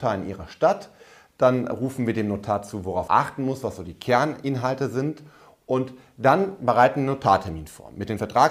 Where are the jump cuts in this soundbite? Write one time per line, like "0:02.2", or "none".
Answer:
0:03.1